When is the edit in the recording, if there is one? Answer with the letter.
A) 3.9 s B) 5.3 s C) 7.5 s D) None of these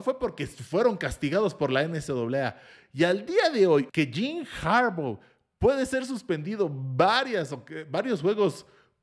A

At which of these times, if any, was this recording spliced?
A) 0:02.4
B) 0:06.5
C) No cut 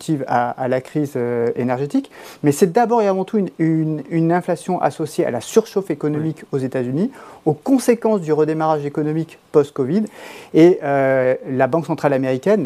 C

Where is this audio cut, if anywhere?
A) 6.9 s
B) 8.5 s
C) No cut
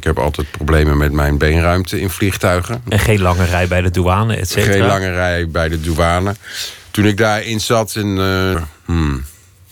B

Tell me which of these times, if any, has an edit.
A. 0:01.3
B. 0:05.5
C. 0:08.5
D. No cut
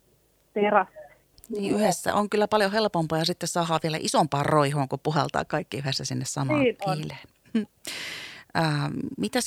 A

